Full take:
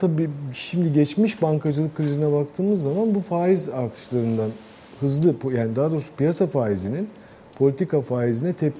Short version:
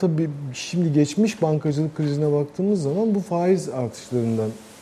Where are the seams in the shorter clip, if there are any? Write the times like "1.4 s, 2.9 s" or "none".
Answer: none